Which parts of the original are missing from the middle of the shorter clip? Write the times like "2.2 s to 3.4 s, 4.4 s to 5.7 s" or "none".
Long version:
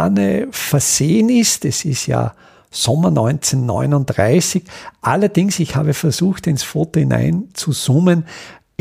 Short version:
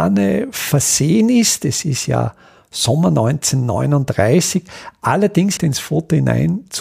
5.6 s to 6.4 s

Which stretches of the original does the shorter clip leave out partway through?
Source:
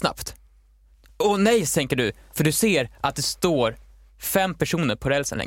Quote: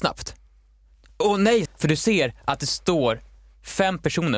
1.7 s to 2.2 s

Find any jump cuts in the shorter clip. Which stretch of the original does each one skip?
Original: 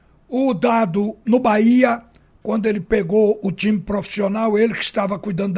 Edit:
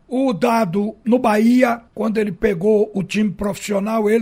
2.1 s to 2.4 s

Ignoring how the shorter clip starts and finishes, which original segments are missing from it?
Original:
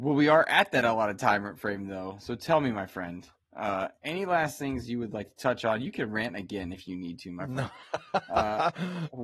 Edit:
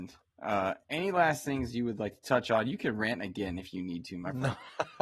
none

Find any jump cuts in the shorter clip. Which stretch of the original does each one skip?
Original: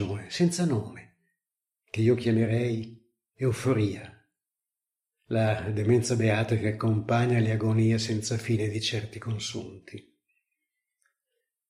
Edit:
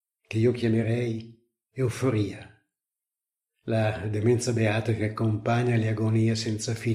none

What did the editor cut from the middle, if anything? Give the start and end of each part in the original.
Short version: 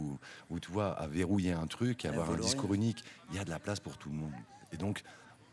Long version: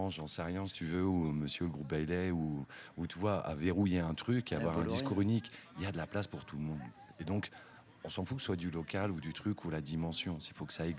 none

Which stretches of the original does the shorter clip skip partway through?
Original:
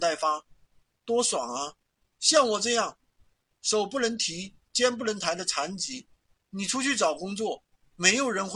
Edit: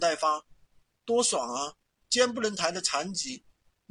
2.0 s to 4.7 s

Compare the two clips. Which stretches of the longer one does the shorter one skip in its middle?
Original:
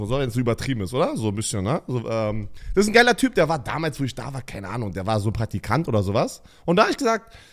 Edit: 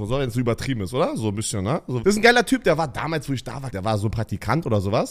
2.0 s to 2.7 s, 4.4 s to 4.9 s

